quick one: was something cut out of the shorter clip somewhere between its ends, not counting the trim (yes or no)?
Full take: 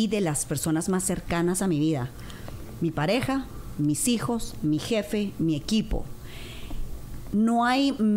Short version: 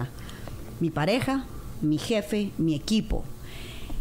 yes